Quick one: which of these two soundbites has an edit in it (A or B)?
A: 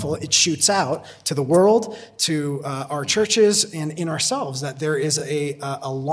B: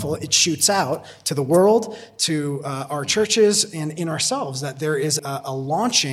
B